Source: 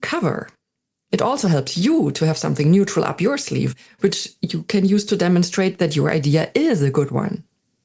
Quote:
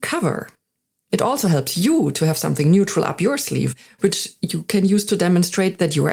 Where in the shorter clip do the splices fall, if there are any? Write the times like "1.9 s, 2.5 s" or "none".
none